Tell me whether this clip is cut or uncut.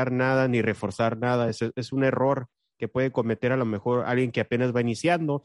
uncut